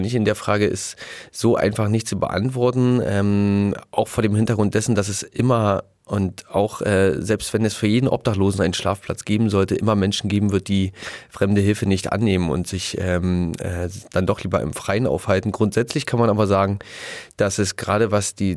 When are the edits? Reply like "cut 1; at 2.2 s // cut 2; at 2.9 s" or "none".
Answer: none

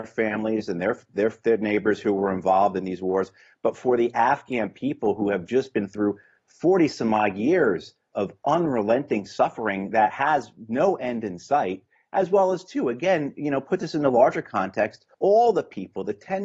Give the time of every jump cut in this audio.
cut 1; at 15.1 s

